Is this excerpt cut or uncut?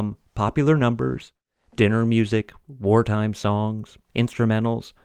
uncut